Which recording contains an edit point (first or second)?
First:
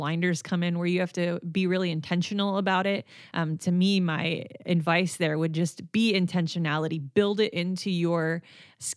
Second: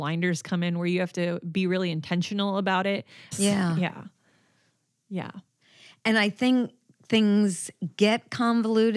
second